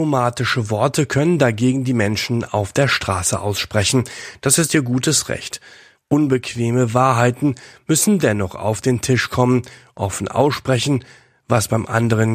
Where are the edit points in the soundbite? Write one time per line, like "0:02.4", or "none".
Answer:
0:05.9